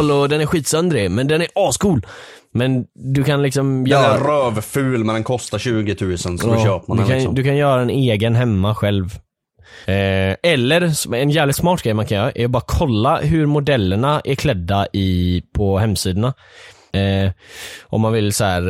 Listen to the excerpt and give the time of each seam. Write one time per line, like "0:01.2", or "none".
0:09.8
0:16.9